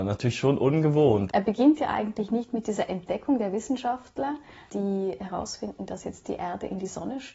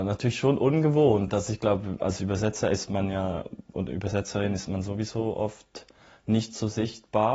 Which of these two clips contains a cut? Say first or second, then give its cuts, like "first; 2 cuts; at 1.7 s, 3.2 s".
first; 1 cut; at 1.3 s